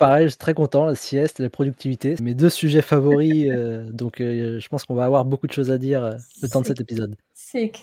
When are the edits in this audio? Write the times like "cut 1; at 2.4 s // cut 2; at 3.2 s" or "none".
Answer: cut 1; at 2.2 s